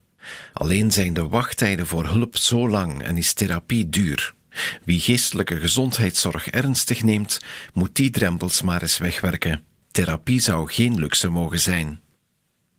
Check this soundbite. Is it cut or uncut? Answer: uncut